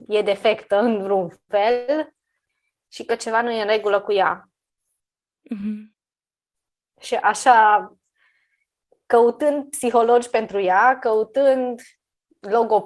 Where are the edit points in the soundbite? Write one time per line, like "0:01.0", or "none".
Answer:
none

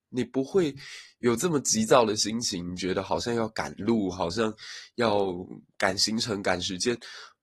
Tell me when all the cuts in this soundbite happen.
none

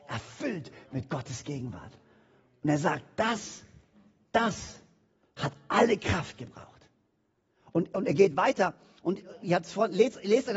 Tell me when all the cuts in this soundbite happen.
none

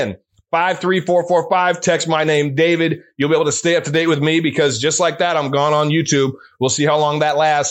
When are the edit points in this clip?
none

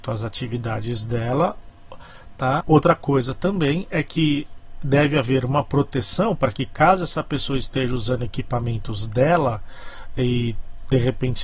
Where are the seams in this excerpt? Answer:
0:02.6

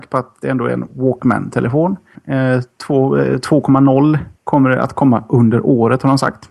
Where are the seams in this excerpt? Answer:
0:02.1
0:04.4

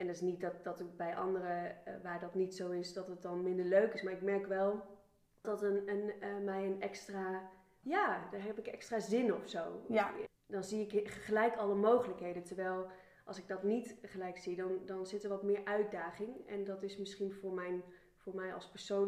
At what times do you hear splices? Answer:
0:05.4
0:07.8
0:10.3

